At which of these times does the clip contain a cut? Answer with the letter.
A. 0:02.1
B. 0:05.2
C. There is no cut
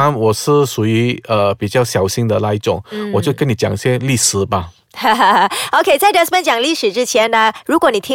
B